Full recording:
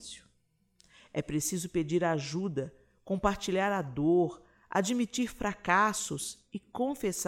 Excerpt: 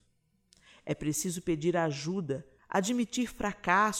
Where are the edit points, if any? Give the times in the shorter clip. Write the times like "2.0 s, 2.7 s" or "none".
2.6 s

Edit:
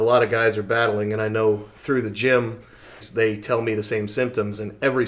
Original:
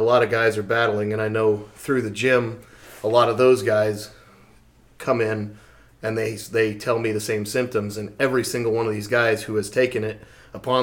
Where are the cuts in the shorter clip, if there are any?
3.0 s

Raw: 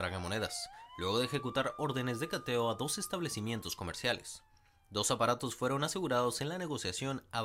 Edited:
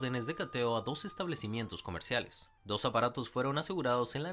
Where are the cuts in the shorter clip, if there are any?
2.6 s

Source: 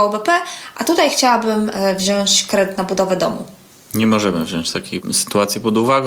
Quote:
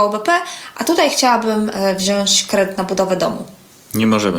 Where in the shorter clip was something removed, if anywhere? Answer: none

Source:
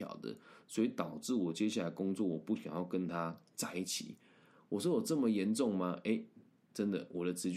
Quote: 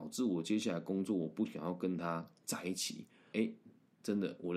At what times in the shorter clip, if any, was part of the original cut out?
3.3 s

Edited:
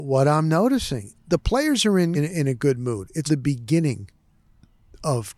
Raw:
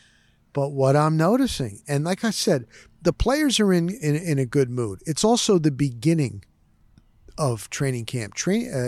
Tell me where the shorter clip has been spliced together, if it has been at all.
1.1 s, 2.1 s, 3.3 s

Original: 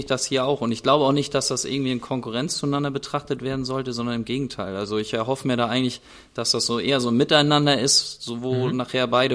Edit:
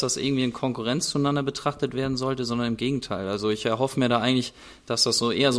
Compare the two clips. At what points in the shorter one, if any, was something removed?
none

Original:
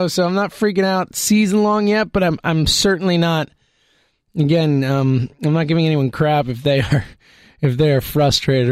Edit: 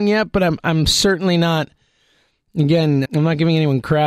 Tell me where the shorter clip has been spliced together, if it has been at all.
3.0 s

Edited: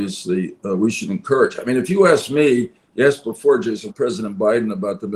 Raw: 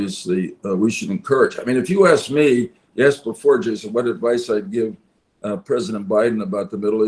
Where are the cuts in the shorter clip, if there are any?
3.9 s

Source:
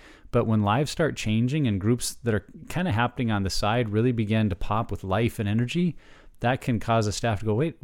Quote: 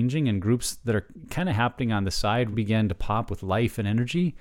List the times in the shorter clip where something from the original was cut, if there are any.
2.5 s

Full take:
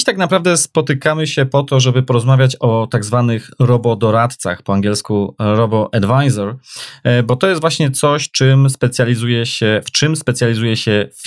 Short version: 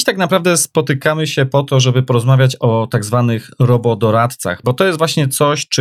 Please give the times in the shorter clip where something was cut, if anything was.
4.6 s

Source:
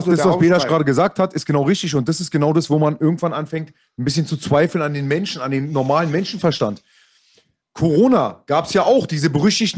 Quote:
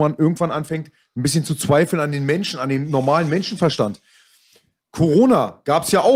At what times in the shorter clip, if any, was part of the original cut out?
none

